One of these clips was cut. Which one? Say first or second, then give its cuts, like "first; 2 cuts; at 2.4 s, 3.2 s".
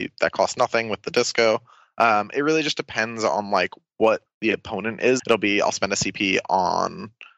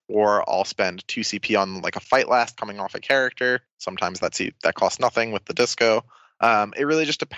first; 1 cut; at 5.2 s